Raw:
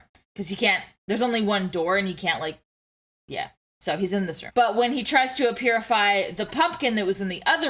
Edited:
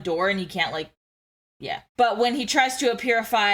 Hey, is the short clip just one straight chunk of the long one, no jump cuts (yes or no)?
no